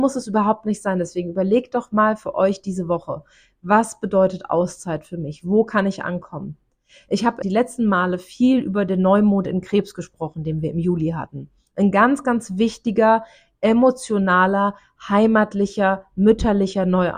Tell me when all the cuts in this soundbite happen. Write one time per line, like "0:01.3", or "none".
0:07.4

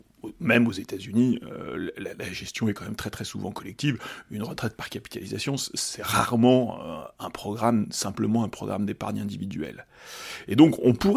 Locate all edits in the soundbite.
none

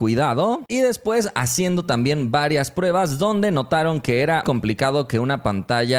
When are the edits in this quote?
0:04.4

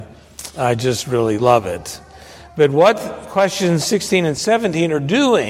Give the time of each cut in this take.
none

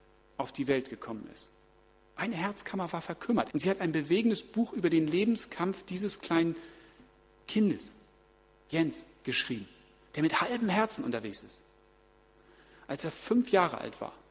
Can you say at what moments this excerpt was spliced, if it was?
0:03.5

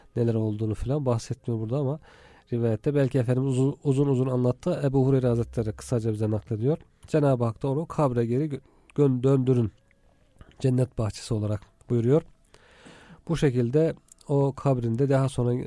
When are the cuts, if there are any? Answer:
none

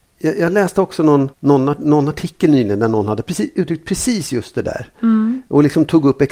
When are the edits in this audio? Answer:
0:01.3

